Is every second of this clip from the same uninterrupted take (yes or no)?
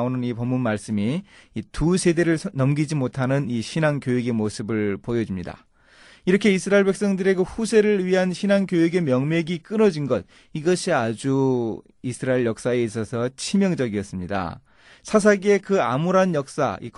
yes